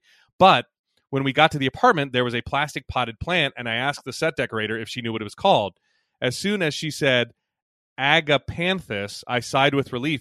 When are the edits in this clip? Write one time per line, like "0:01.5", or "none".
none